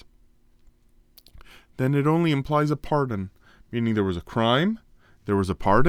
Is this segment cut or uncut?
uncut